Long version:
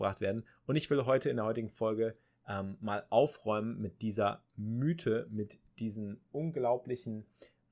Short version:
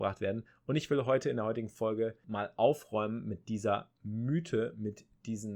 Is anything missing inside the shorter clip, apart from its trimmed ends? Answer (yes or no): yes